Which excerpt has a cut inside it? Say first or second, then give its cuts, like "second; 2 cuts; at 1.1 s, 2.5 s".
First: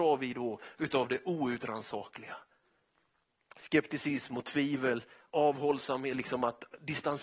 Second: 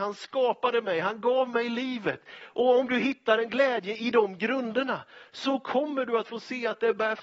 second; 1 cut; at 2.4 s